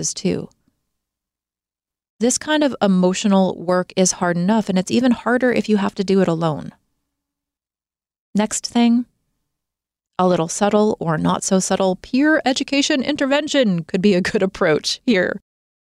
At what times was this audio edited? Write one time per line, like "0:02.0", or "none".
none